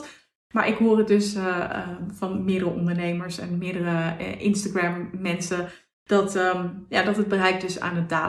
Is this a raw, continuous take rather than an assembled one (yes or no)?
yes